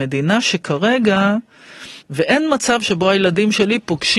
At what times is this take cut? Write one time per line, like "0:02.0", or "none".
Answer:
0:02.0